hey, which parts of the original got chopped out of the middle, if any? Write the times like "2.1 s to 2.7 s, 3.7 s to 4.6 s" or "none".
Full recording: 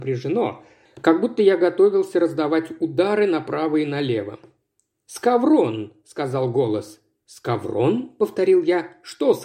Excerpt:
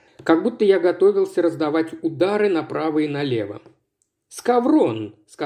none